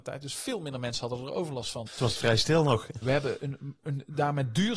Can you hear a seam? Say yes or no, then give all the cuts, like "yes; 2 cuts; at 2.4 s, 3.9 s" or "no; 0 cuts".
yes; 2 cuts; at 1.9 s, 3.0 s